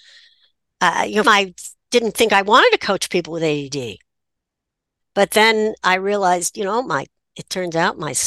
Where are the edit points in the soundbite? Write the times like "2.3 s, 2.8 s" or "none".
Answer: 1.2 s